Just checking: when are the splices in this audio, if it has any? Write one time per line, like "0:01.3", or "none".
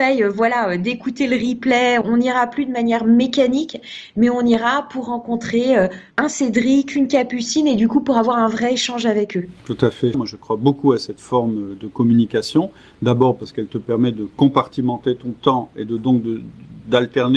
0:02.0
0:06.1
0:10.1